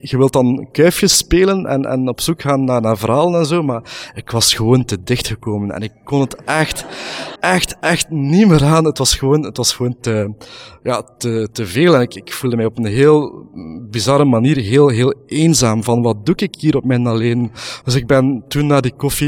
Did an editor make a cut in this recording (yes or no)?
yes